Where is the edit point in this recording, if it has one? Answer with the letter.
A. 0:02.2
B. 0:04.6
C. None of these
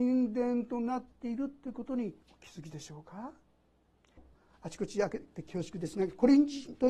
A